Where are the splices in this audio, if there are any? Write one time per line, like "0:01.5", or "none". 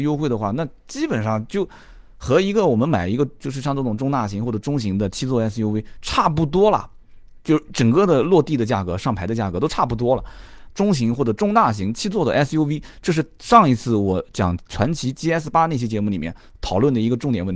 0:10.7